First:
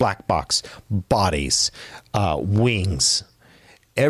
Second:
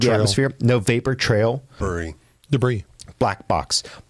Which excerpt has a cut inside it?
second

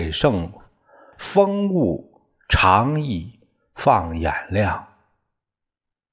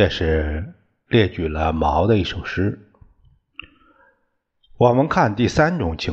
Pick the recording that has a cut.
first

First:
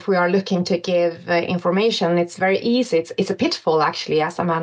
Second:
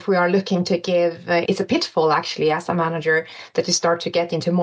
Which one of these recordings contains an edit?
second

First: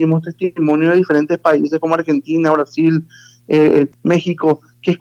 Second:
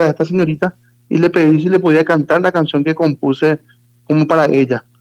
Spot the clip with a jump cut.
first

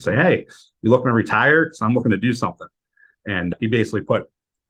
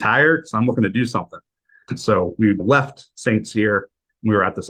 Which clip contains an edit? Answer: second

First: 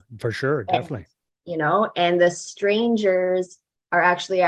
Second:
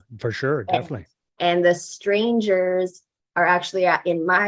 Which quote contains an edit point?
second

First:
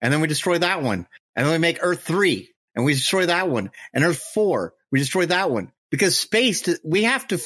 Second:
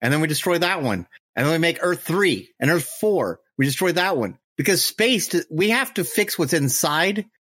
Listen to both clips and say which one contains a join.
second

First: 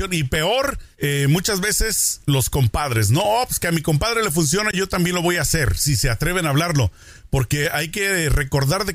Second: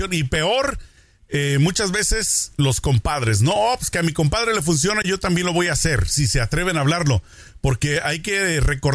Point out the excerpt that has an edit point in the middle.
first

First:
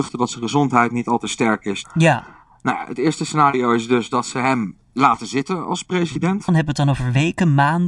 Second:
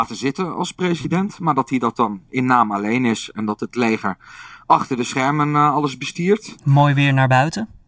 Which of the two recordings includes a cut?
first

